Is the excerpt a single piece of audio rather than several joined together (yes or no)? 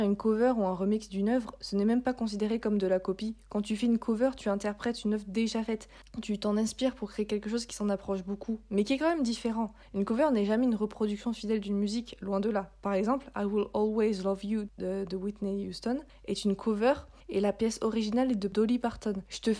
yes